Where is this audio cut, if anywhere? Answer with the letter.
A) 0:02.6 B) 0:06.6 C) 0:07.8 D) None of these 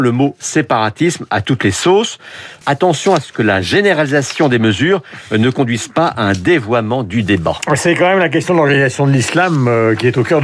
A